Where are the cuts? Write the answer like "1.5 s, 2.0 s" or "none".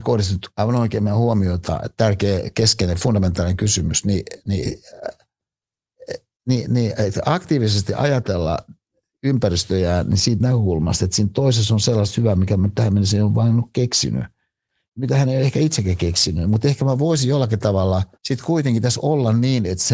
18.1 s

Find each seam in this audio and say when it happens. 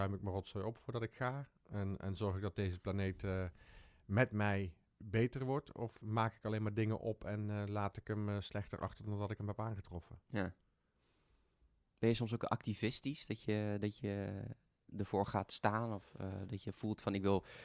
6.0 s

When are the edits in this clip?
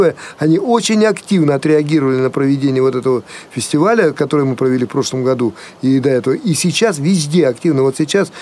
none

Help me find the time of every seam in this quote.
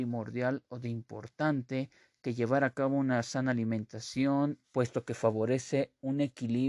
4.6 s

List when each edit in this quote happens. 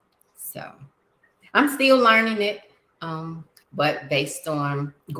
3.6 s

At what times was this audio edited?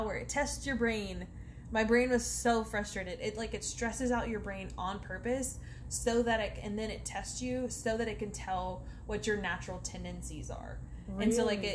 none

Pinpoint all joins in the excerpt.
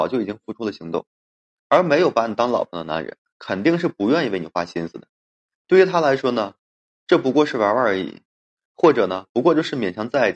none

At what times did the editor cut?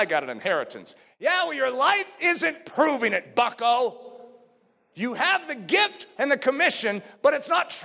4.9 s, 6.2 s

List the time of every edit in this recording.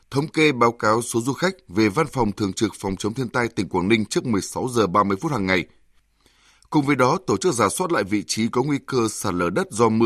none

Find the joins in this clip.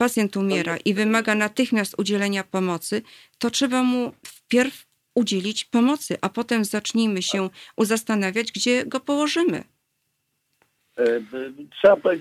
none

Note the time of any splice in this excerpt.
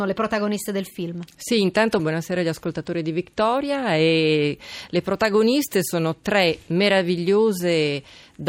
2.0 s

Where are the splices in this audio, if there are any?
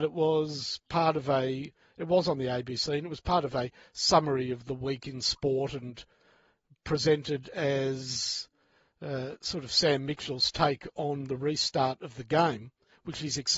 none

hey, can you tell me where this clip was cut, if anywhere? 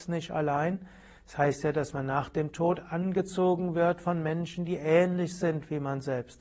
none

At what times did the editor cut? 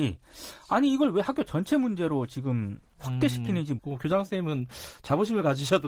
3.8 s

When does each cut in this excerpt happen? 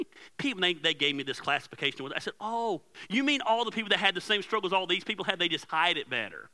none

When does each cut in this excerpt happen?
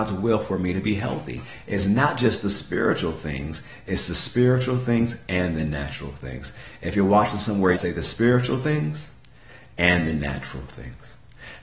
7.7 s

